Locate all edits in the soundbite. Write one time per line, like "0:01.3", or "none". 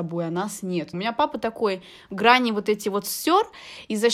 0:00.9